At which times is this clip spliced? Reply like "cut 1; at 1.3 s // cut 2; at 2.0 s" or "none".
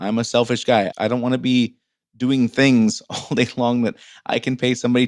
cut 1; at 0.9 s